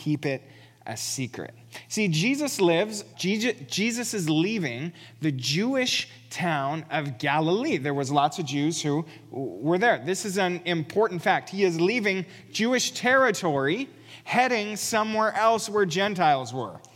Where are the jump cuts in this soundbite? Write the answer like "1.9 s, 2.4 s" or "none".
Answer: 3.1 s